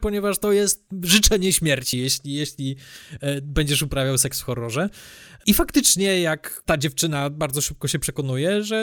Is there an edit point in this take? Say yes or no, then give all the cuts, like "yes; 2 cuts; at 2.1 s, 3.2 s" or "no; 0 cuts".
no; 0 cuts